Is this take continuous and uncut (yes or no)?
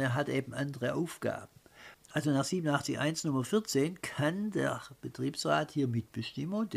no